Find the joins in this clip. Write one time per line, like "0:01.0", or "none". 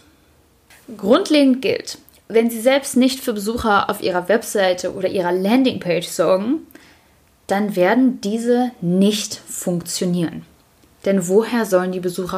none